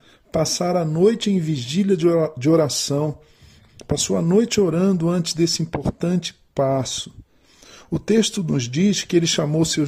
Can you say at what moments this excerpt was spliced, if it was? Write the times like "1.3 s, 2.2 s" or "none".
none

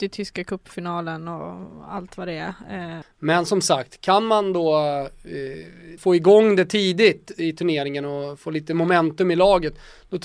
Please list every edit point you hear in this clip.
3.0 s, 6.0 s

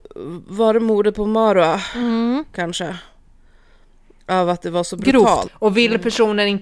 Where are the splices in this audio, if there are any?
5.4 s

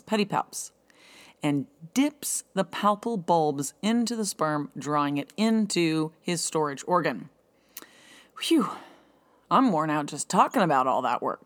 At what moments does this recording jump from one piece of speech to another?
none

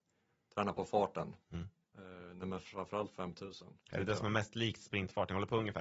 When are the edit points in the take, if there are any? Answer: 1.4 s, 3.8 s

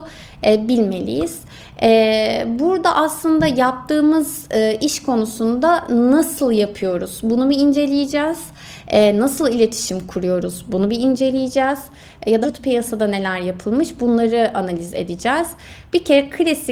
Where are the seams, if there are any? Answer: 12.4 s

